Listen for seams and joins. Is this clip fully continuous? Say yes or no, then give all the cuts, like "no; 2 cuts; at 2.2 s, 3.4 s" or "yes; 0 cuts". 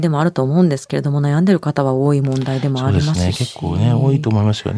yes; 0 cuts